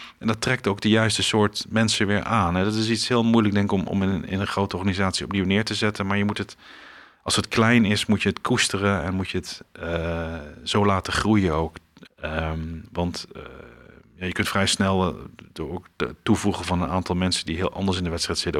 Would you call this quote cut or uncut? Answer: cut